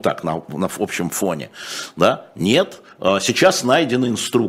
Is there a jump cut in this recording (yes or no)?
no